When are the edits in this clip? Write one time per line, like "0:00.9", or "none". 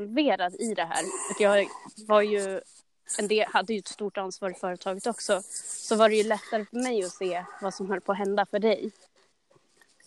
none

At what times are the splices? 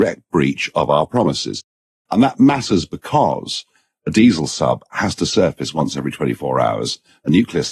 0:02.1

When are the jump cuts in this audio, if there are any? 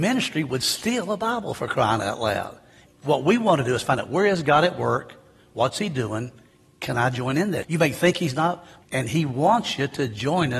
0:02.9
0:07.6
0:08.8

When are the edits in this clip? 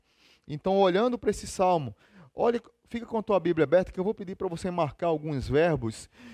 none

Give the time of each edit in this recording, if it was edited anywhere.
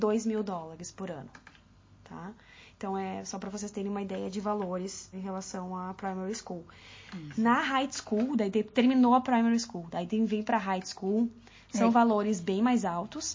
0:05.1

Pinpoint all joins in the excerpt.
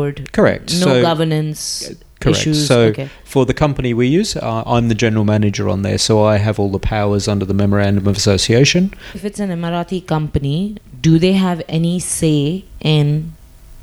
0:09.1

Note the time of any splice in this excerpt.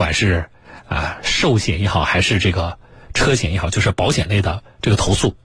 none

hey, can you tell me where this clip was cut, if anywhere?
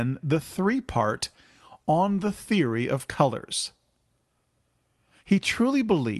none

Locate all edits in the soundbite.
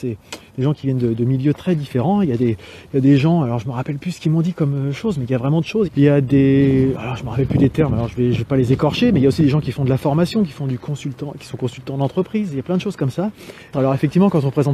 0:05.9
0:13.7

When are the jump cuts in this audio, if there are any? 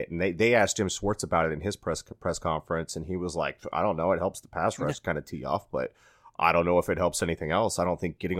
none

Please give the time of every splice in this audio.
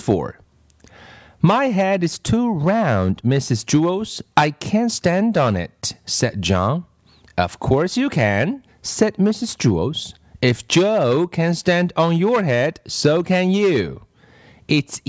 0:08.7

